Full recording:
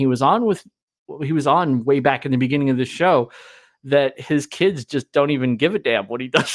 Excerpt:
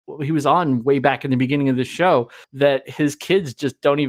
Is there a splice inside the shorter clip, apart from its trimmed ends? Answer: yes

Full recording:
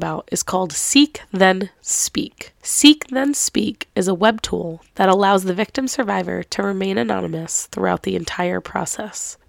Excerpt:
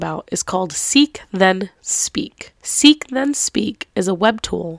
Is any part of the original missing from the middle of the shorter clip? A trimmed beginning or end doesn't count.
no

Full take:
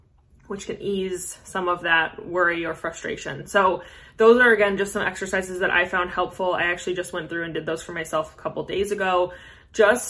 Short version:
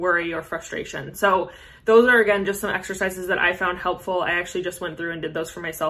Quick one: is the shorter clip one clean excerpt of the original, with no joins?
yes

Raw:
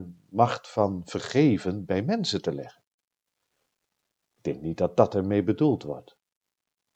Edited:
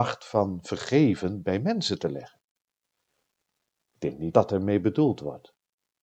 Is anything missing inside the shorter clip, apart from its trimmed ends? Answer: yes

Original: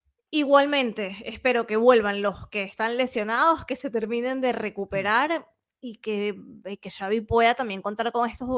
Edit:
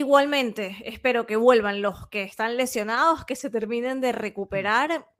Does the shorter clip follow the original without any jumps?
yes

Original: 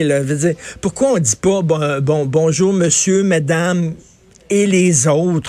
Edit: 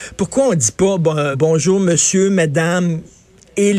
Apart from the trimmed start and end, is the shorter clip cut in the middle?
yes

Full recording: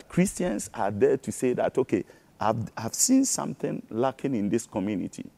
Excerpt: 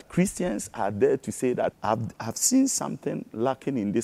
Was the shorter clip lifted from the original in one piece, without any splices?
no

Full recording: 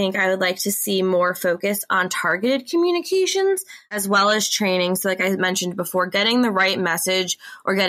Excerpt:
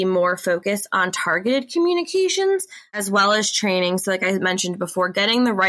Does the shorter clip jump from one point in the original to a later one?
no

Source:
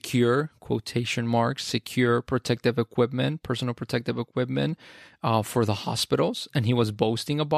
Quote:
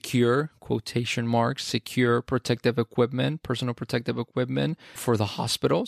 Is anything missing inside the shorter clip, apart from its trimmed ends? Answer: yes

